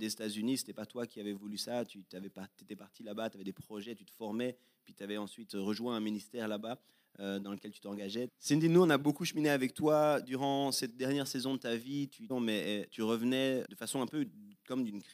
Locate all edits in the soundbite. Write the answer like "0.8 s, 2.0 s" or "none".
8.3 s, 12.3 s, 13.6 s